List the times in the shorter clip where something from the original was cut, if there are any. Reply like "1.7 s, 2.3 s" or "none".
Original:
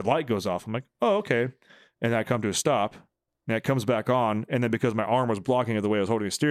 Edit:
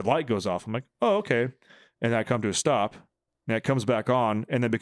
none